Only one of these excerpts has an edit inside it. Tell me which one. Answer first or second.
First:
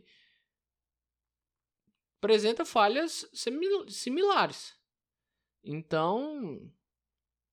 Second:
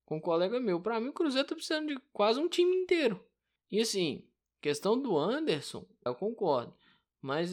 second